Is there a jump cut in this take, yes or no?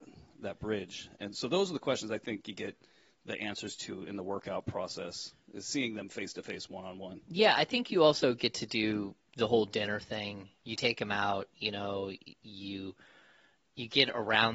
no